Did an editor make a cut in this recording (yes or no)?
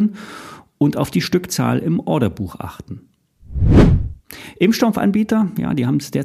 no